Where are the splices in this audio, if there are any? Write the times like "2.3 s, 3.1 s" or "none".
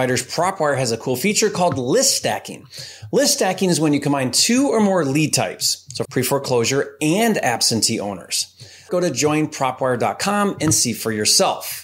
6.0 s, 8.9 s